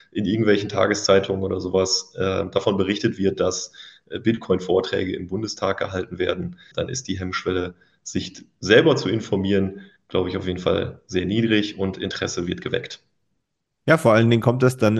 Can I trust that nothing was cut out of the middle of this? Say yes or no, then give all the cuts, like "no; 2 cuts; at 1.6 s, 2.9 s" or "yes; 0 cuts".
no; 1 cut; at 6.7 s